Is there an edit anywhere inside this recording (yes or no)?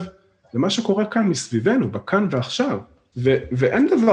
yes